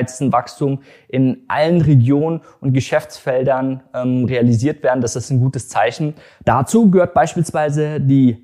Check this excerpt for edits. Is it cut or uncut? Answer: cut